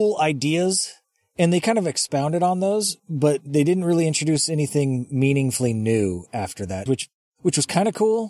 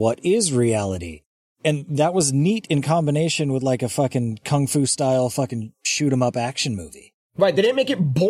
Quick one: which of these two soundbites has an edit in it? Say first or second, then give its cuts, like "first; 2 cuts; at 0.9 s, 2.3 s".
first; 2 cuts; at 3.0 s, 6.9 s